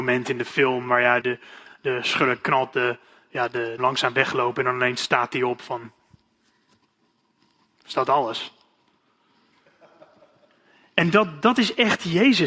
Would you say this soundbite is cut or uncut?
cut